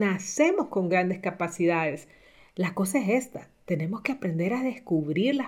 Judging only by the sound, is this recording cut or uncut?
uncut